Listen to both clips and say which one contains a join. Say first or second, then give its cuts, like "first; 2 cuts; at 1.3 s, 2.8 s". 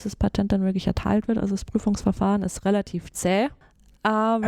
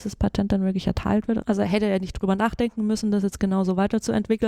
second; 1 cut; at 1.4 s